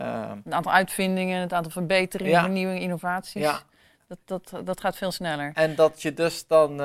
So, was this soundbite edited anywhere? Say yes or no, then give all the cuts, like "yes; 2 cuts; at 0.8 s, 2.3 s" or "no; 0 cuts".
no; 0 cuts